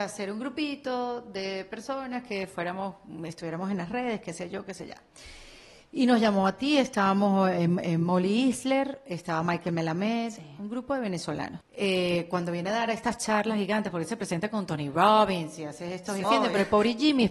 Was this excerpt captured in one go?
no; 2 cuts; at 11.6 s, 16.2 s

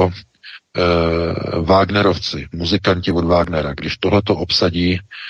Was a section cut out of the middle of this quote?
no; 0 cuts

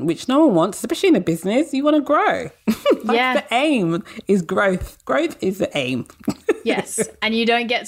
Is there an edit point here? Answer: no; 0 cuts

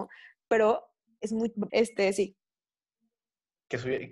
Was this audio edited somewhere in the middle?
yes; 1 cut; at 1.7 s

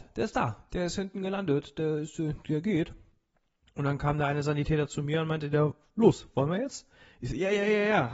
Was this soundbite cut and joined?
no; 0 cuts

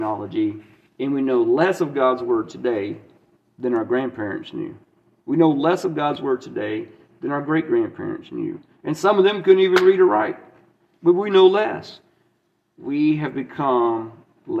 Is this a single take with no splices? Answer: yes; 0 cuts

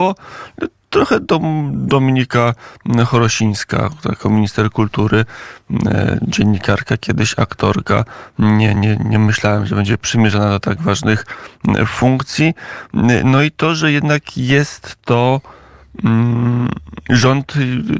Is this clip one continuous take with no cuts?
no; 1 cut; at 8.8 s

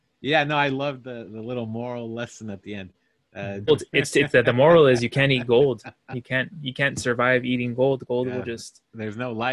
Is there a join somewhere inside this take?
yes; 1 cut; at 3.7 s

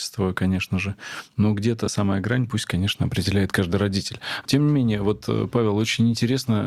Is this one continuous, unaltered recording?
yes; 0 cuts

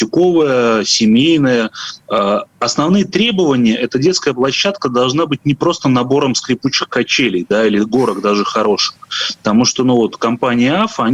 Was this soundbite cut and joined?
yes; 1 cut; at 2.0 s

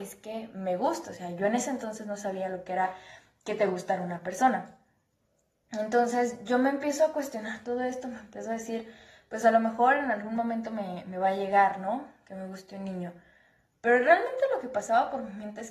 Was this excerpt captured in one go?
yes; 0 cuts

